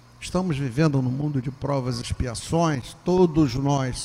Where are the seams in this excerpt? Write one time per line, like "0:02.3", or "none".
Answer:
none